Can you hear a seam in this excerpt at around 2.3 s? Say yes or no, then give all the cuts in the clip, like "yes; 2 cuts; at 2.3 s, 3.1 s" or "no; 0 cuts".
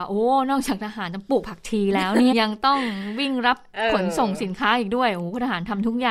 yes; 1 cut; at 2.3 s